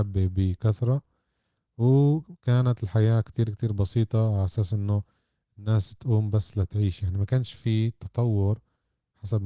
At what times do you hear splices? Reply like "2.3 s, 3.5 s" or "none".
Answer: none